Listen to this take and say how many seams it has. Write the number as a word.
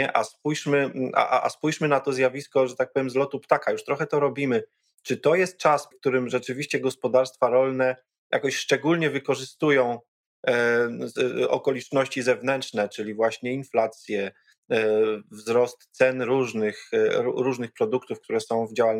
one